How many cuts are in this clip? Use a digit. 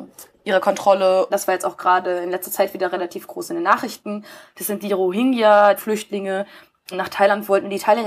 3